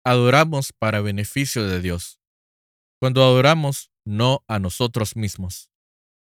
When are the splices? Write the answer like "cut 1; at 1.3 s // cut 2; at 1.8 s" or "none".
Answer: cut 1; at 4.0 s